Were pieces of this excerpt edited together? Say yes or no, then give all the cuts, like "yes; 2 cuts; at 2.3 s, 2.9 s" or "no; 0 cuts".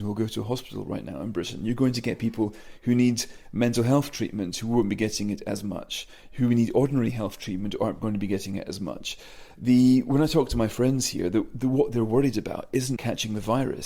yes; 1 cut; at 13.0 s